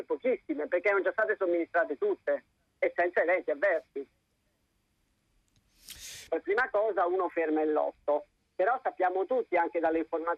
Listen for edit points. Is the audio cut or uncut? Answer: cut